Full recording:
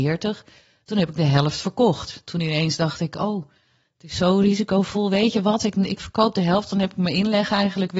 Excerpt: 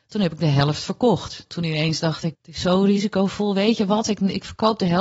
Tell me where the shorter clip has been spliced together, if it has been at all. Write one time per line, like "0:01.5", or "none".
0:02.3